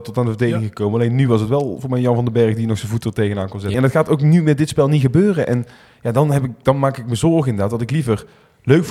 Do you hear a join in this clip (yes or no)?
yes